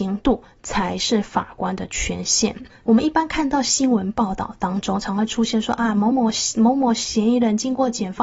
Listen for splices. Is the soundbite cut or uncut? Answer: uncut